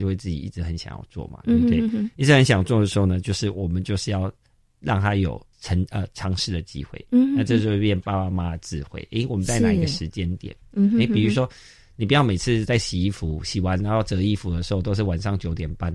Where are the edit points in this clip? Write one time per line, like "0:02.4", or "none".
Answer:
0:05.5

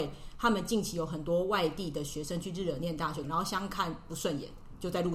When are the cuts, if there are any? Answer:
0:03.2

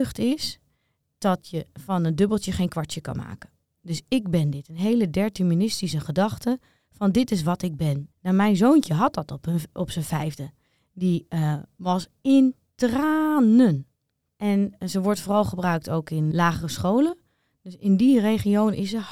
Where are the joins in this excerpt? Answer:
0:08.1
0:14.3
0:16.3

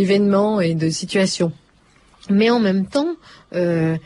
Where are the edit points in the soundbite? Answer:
none

